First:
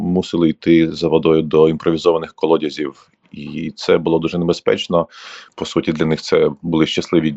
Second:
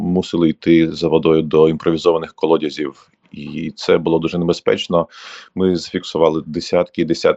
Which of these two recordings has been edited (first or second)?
first